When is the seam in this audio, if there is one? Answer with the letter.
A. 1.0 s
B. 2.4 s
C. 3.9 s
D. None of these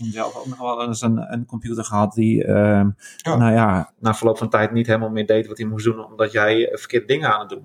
C